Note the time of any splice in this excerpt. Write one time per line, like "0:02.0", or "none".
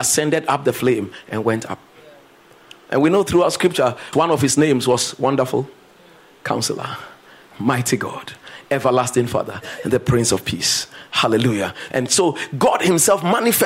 0:04.1
0:11.9